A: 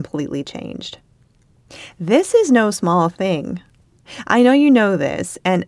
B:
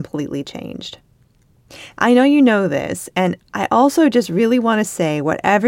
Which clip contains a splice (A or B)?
B